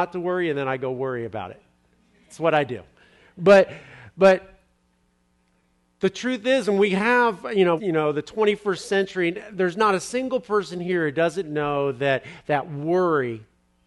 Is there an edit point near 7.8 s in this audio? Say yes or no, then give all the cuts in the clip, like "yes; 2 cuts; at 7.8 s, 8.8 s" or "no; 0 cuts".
yes; 1 cut; at 7.8 s